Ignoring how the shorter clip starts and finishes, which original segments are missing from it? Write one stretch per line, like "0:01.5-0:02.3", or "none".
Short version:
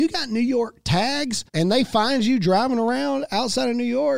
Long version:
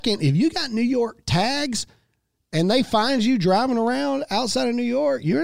0:01.9-0:02.5